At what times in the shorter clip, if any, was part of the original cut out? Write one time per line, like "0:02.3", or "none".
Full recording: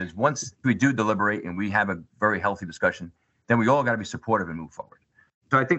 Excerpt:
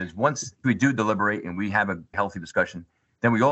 0:02.1